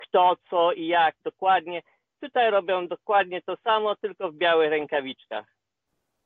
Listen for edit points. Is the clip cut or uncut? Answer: uncut